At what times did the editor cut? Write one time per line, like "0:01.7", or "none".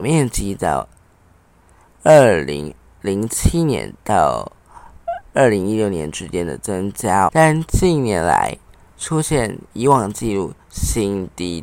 0:07.3